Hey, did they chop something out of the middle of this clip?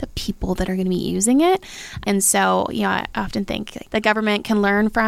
yes; 1 cut; at 3.9 s

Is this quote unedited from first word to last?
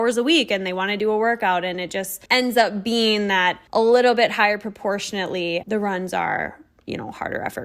no; 3 cuts; at 2.3 s, 3.7 s, 5.6 s

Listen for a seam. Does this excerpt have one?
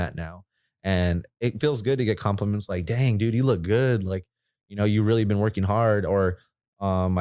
no; 0 cuts

